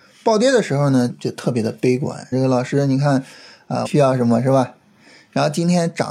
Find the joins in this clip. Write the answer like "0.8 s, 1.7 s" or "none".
1.1 s, 2.3 s, 3.8 s